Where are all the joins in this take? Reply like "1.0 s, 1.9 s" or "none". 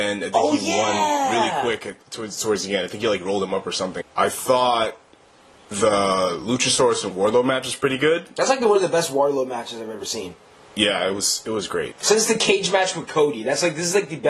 4.0 s